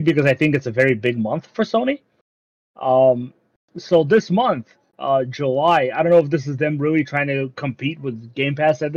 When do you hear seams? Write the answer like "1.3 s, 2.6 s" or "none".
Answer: none

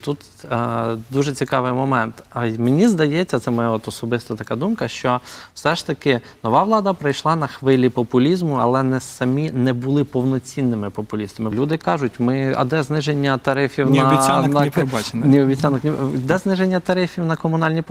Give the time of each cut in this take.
11.5 s

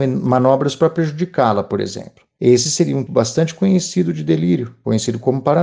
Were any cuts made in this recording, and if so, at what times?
3.1 s

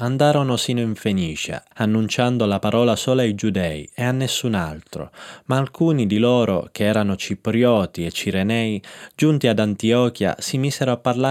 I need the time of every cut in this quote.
1.7 s

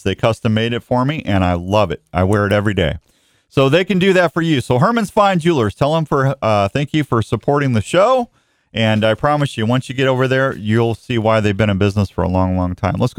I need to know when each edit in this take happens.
none

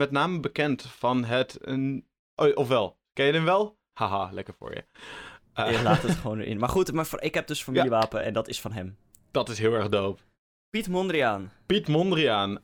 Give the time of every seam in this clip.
3.9 s

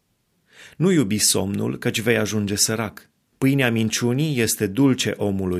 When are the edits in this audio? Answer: 3.3 s

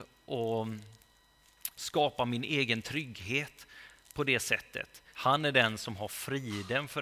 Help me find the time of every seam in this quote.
1.7 s, 5.1 s

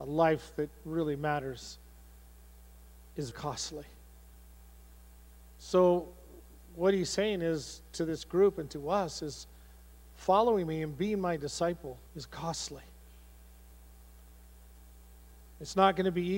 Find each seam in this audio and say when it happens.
3.3 s, 12.1 s

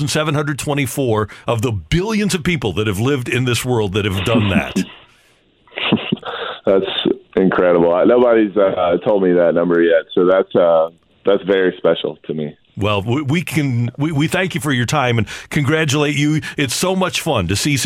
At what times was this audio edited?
none

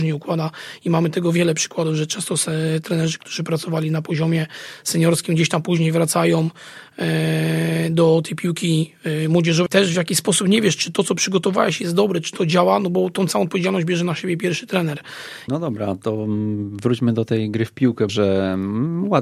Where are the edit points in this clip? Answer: 9.7 s, 15.5 s, 18.1 s

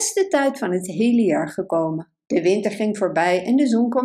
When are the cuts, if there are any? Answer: 2.2 s

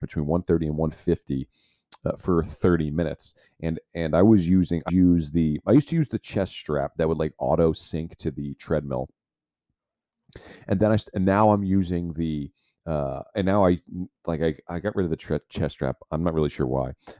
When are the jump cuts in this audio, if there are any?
4.9 s

